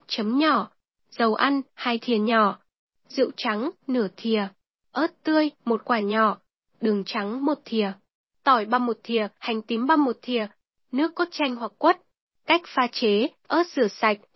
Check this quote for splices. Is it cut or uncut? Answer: uncut